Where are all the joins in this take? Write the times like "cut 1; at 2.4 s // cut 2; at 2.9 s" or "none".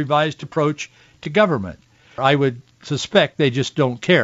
cut 1; at 2.2 s